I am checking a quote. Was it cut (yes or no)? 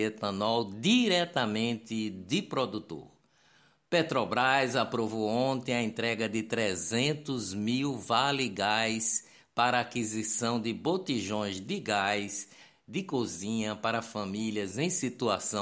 no